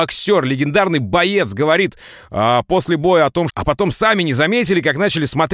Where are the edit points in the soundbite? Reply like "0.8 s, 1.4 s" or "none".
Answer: 3.5 s